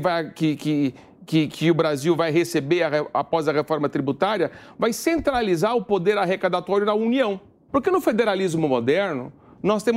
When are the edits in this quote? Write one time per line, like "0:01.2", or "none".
0:07.7